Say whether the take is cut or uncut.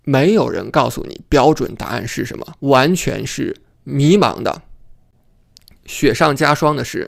cut